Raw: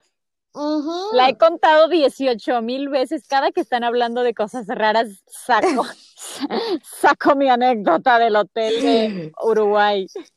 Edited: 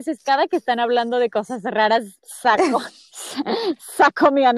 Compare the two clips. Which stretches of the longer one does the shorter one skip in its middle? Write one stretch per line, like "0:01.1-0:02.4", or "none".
none